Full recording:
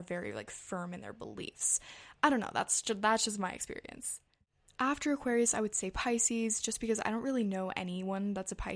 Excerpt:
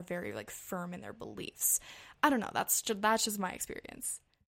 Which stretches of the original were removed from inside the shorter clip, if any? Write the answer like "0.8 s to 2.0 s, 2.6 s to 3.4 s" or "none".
none

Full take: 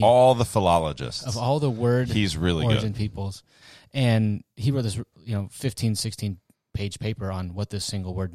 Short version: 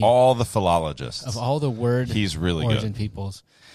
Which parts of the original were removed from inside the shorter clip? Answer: none

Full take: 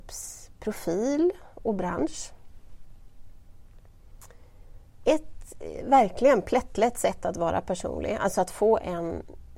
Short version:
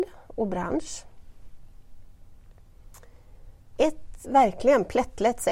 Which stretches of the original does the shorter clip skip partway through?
5.5 s to 5.8 s

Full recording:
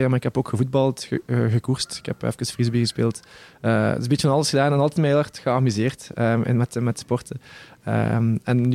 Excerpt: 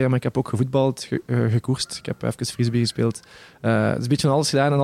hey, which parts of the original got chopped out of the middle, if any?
none

